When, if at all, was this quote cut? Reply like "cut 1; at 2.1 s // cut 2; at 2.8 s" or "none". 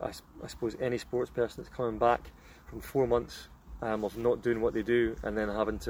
none